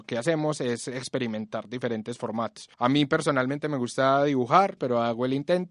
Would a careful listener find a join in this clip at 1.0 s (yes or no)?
no